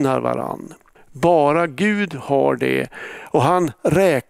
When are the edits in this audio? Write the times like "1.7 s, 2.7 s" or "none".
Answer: 1.0 s

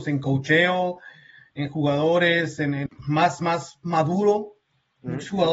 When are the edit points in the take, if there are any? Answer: 2.9 s

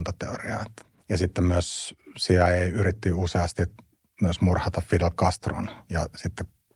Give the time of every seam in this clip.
0.9 s

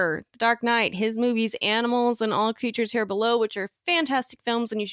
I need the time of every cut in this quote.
none

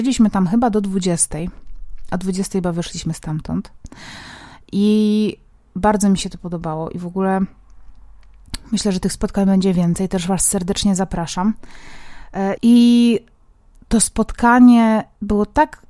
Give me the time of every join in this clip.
12.6 s

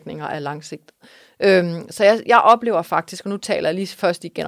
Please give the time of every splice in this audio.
none

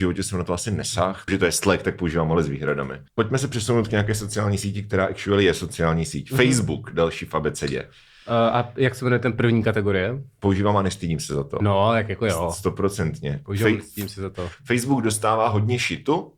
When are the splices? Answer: 1.3 s

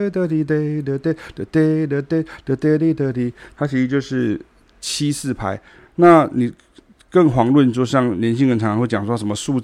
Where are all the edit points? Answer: 5.8 s

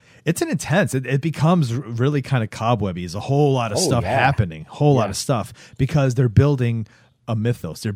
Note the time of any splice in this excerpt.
none

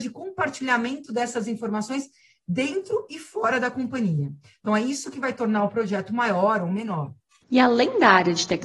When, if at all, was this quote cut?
none

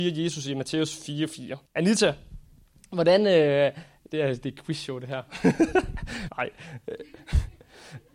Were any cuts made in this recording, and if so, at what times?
1.7 s, 6.3 s

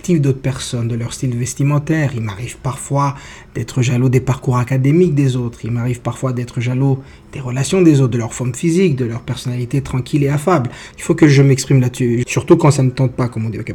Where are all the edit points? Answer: 10.9 s, 12.2 s

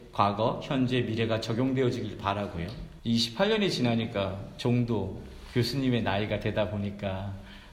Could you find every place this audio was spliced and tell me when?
3.0 s

